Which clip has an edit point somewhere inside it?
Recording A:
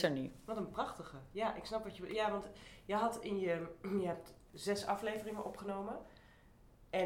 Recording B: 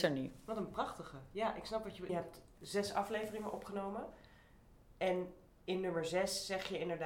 B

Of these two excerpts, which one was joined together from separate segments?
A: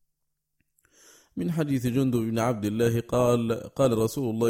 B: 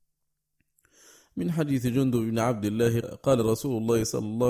B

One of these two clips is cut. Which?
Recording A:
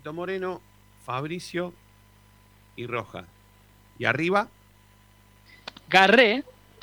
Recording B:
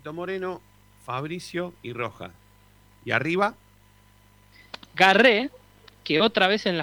B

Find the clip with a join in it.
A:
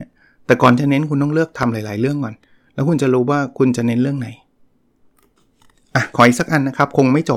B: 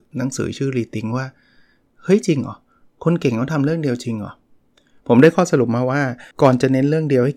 B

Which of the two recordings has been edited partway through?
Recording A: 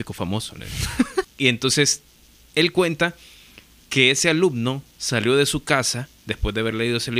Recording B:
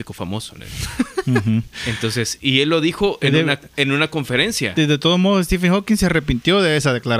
A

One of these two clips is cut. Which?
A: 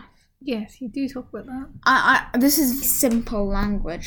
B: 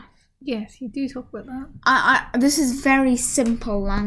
A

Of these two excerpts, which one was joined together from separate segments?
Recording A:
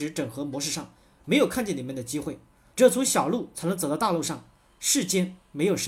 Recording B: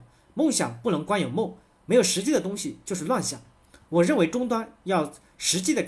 A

